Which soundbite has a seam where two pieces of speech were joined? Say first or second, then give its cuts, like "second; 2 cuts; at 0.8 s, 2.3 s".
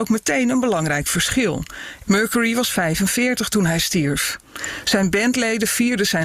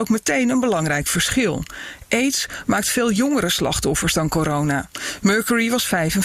first; 1 cut; at 2.0 s